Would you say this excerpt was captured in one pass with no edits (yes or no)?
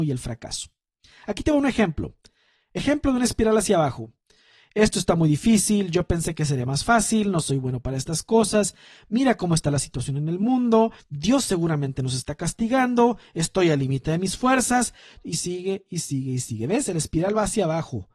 no